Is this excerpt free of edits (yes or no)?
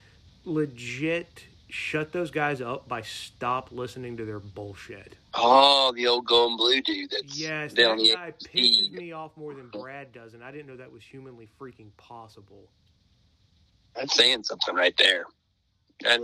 no